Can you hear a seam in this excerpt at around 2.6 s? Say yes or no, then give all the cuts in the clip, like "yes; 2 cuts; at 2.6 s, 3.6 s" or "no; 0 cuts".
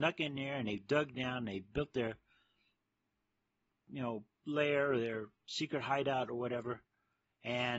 no; 1 cut; at 4.3 s